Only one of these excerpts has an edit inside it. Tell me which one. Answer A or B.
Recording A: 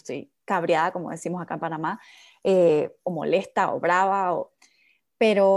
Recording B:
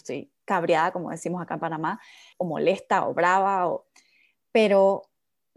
B